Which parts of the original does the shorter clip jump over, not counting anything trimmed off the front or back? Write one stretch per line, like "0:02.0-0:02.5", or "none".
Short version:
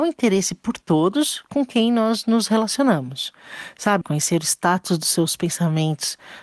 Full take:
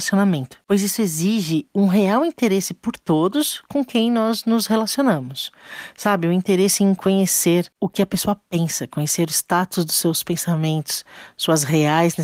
0:06.2-0:08.9

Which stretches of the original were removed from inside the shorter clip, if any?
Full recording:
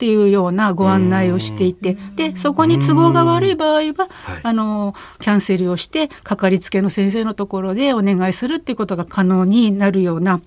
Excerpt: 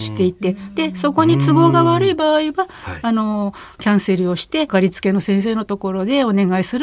0:06.1-0:06.4

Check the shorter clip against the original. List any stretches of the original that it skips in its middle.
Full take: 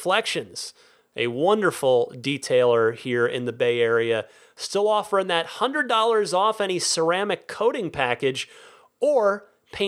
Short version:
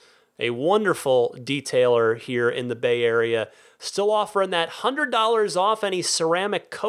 none

